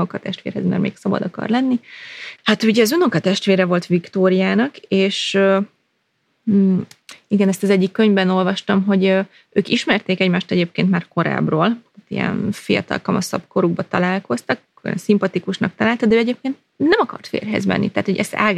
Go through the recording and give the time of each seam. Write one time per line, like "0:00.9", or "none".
0:02.4